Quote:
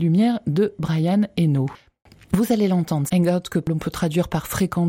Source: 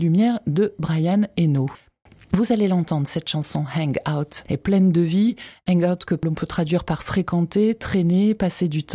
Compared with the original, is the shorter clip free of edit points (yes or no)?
no